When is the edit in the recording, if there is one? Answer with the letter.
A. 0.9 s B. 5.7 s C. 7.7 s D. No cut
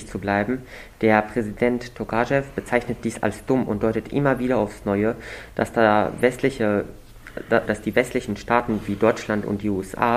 C